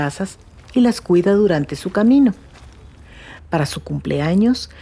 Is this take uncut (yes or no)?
no